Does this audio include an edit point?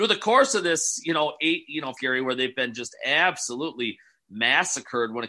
yes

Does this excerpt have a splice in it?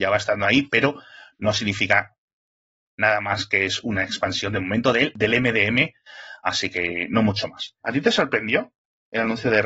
yes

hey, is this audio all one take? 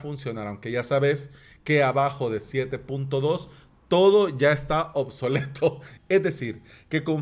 no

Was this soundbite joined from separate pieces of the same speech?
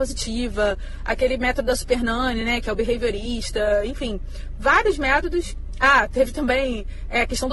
no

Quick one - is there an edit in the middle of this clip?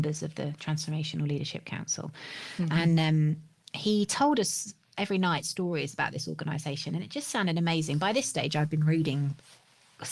no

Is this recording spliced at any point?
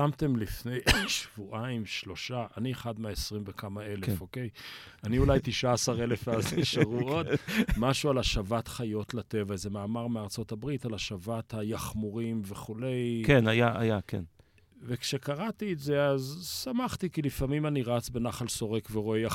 no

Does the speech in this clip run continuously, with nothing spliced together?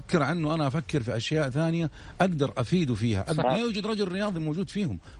no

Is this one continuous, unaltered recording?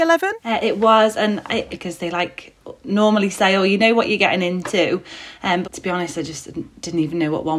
no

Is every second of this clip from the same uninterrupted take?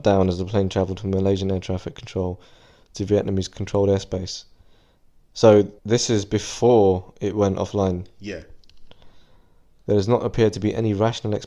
no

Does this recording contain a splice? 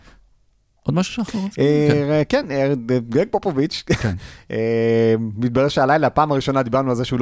no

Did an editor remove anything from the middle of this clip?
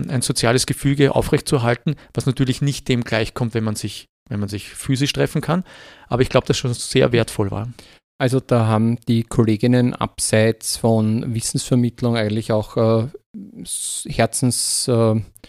no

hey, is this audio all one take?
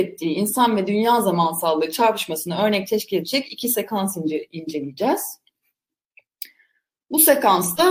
yes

